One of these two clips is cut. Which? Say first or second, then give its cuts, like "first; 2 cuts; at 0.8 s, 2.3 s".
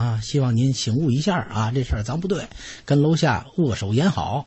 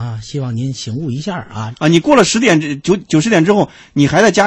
second; 1 cut; at 1.7 s